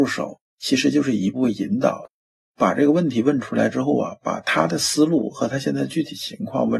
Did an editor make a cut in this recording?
yes; 1 cut; at 1.3 s

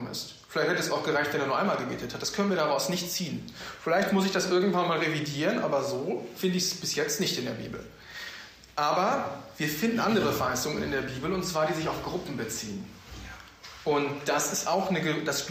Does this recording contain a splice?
no; 0 cuts

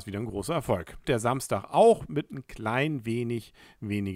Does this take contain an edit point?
yes; 1 cut; at 1.0 s

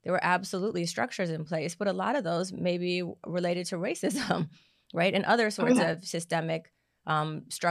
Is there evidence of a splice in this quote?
no; 0 cuts

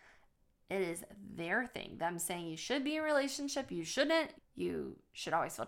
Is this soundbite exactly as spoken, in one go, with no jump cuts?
no; 1 cut; at 4.3 s

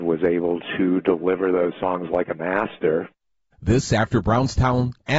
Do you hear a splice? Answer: yes; 1 cut; at 3.5 s

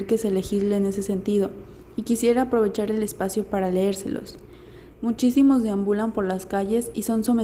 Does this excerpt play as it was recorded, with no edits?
no; 1 cut; at 4.9 s

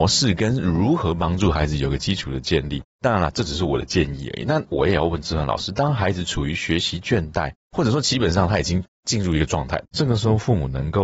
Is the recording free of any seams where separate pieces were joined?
no; 1 cut; at 9.8 s

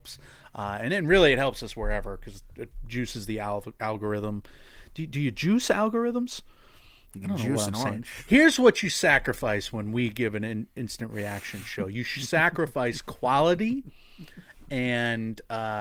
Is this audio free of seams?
yes; 0 cuts

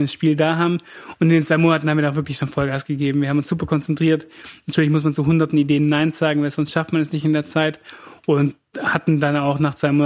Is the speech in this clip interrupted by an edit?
no; 0 cuts

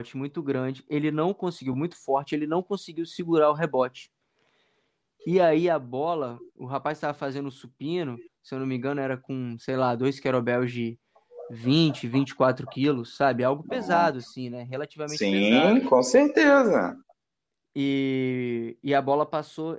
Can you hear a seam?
no; 0 cuts

